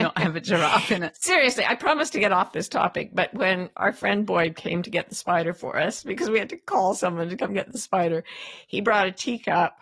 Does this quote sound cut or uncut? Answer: uncut